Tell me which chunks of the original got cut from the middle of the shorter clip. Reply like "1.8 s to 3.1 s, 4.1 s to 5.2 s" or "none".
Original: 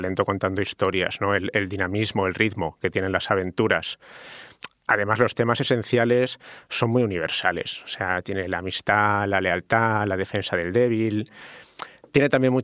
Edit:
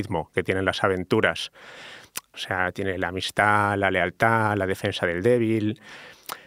4.8 s to 7.8 s